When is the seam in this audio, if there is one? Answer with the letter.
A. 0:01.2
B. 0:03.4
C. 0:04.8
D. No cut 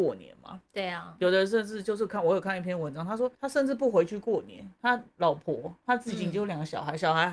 B